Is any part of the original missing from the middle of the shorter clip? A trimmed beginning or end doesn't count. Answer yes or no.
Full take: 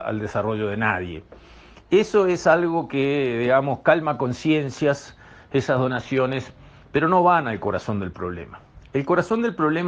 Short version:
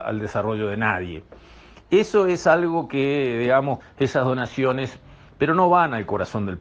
yes